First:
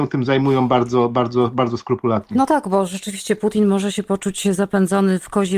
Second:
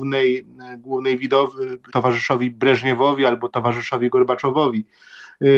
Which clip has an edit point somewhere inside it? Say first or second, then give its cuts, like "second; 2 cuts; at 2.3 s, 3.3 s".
second; 1 cut; at 1.9 s